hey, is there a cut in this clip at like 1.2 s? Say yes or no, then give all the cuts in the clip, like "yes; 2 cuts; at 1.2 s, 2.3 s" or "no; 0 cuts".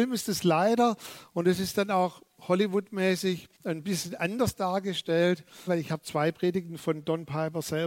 no; 2 cuts; at 3.6 s, 5.7 s